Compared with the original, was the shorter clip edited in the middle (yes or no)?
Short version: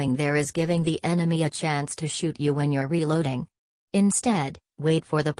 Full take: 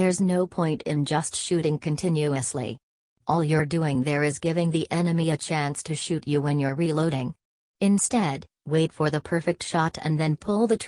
no